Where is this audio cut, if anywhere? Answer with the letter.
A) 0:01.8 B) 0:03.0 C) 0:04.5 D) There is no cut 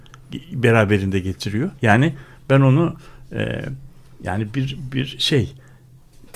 A